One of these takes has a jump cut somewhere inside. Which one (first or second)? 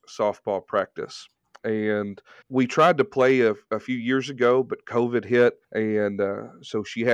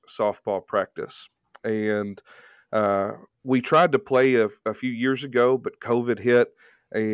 first